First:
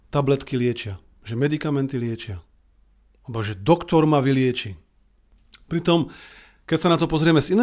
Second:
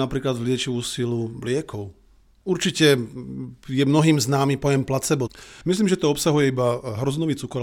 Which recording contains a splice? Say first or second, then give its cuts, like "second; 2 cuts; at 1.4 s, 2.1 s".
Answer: second; 1 cut; at 5.6 s